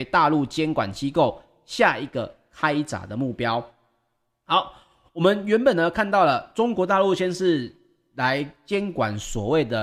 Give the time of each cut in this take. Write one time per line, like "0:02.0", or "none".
none